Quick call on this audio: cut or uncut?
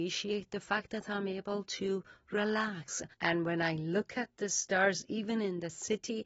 cut